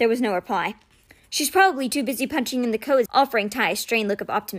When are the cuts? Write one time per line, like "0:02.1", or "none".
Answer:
0:03.1